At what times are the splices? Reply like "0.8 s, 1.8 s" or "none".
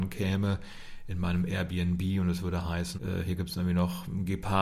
2.9 s